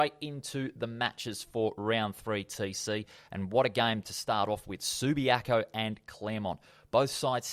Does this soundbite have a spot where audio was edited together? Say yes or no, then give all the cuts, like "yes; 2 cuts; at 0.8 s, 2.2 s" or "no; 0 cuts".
no; 0 cuts